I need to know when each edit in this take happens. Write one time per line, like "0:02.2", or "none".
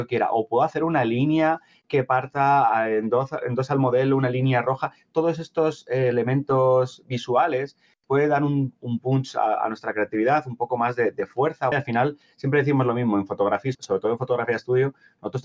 0:11.7
0:13.7